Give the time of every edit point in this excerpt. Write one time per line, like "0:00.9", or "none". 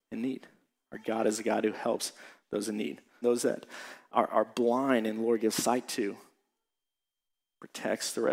0:03.2